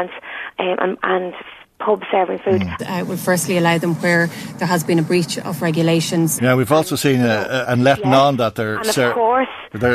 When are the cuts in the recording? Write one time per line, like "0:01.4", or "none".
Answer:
0:02.8
0:06.4
0:07.6